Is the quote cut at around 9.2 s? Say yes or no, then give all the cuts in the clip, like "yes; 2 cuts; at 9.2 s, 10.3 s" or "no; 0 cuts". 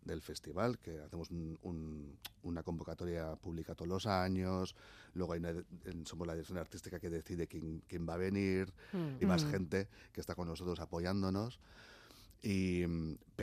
yes; 1 cut; at 9.2 s